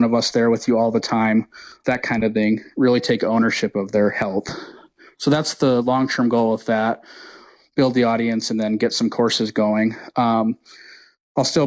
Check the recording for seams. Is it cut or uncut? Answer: uncut